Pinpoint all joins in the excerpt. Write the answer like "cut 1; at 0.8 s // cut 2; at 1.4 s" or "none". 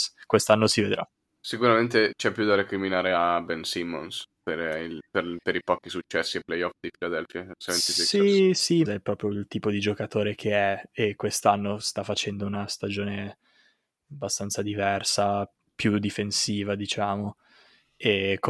cut 1; at 8.9 s